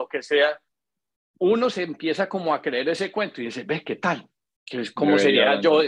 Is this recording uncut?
yes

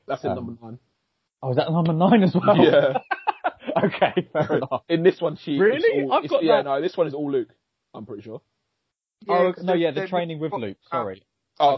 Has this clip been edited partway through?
no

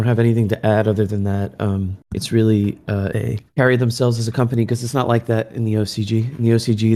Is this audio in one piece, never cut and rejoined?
no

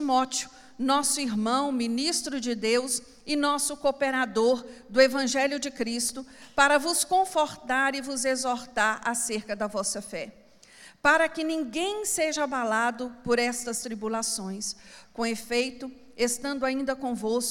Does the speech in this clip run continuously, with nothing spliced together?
no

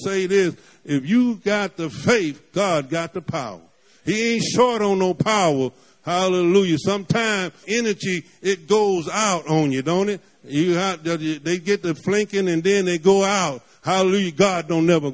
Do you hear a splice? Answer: yes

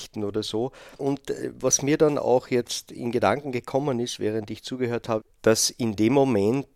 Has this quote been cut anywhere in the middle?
yes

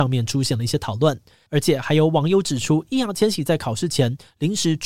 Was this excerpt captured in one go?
no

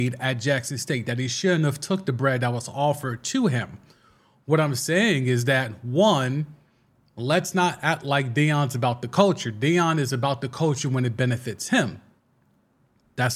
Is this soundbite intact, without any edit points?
yes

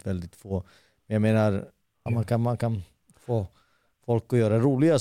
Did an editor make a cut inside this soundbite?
yes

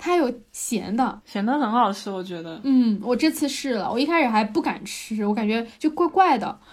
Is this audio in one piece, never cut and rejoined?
yes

